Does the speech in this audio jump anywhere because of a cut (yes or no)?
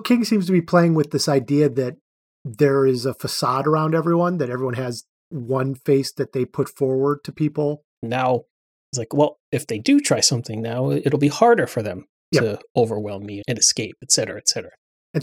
yes